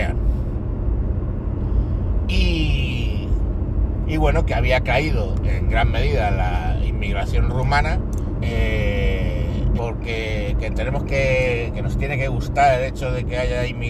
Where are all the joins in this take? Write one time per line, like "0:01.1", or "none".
0:05.4
0:08.4
0:09.8